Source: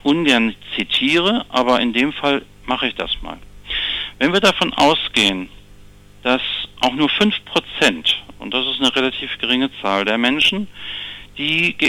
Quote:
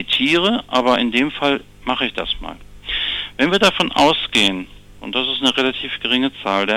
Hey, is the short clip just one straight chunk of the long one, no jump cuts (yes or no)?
no